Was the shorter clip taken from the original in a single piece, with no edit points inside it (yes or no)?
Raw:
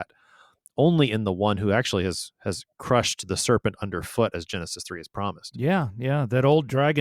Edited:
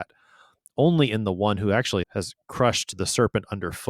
no